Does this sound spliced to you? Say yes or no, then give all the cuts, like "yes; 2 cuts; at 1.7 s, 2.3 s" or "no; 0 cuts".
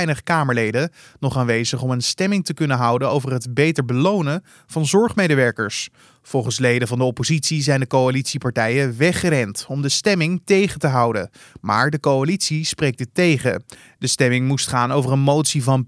no; 0 cuts